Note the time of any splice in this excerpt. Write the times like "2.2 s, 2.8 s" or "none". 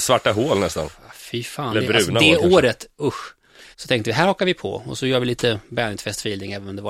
3.7 s